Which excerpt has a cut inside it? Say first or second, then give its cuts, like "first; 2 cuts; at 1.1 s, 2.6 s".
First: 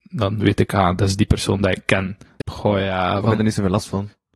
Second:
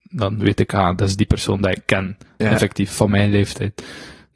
first; 1 cut; at 2.4 s